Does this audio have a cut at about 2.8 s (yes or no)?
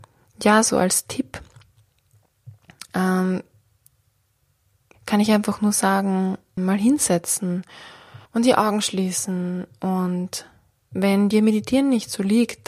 no